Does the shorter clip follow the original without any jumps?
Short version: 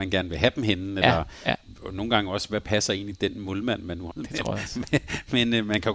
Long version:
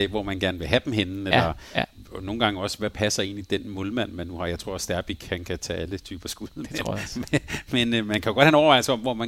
no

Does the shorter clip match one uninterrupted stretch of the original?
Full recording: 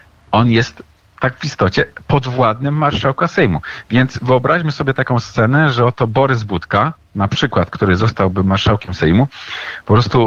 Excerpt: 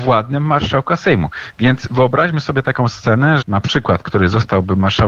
no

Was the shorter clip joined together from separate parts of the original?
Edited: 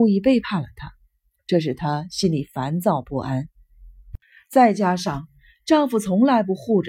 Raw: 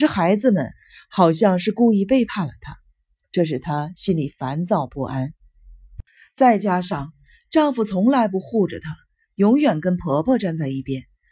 no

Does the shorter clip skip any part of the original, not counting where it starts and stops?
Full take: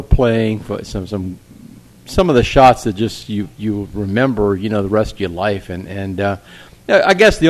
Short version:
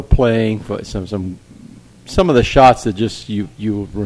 no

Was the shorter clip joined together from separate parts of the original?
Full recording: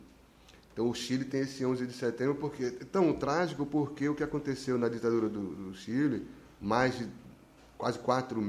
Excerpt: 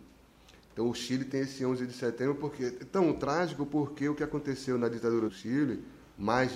yes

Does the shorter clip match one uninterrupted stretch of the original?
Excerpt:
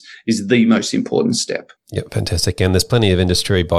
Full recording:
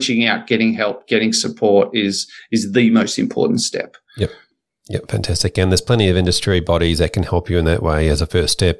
no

